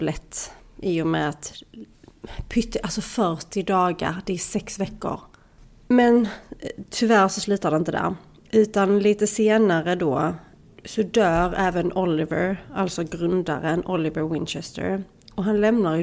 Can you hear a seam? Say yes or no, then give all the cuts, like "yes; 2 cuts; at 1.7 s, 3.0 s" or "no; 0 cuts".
no; 0 cuts